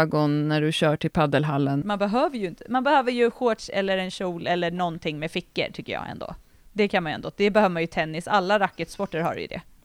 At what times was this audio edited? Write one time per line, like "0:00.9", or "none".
0:01.8